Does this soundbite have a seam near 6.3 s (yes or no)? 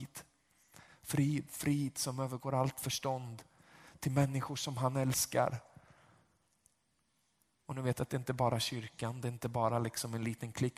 no